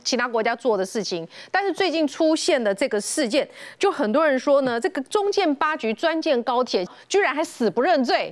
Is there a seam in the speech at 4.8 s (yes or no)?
no